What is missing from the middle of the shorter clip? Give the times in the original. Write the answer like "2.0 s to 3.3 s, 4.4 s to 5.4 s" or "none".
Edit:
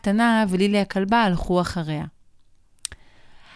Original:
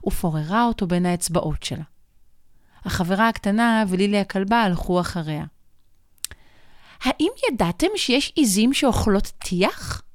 none